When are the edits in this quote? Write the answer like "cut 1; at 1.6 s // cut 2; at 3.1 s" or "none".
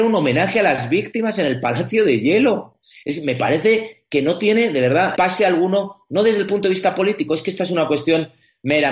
cut 1; at 5.1 s